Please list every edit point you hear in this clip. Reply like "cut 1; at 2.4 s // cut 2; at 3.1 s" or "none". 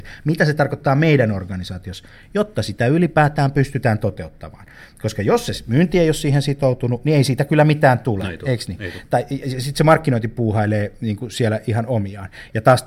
none